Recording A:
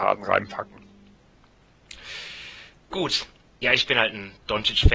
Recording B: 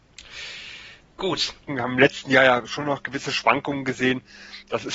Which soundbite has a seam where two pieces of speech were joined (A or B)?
B